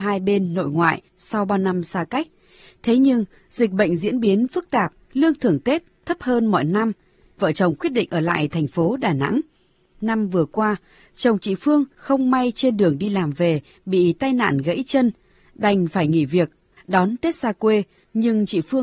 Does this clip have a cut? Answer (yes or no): yes